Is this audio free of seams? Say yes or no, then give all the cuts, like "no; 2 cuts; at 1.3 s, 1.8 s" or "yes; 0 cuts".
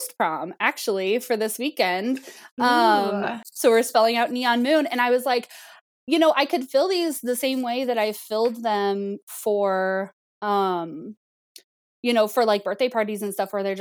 no; 1 cut; at 3.4 s